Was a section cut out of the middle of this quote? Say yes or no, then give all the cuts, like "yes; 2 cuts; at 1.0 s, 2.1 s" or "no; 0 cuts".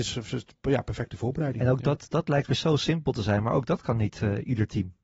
no; 0 cuts